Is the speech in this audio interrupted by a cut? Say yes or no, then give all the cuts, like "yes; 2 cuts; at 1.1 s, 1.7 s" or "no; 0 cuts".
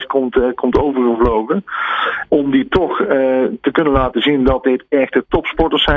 yes; 1 cut; at 2.3 s